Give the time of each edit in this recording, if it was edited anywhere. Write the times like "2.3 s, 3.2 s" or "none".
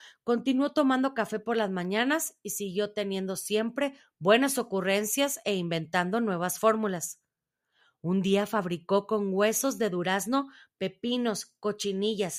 none